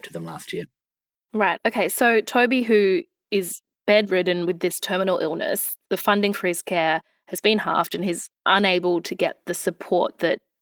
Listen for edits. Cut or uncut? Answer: uncut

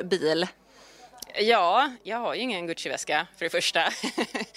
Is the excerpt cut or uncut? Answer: uncut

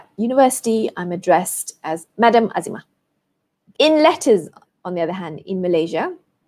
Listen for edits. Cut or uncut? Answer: uncut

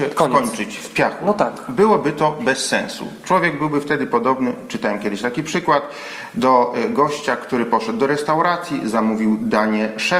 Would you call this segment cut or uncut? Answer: uncut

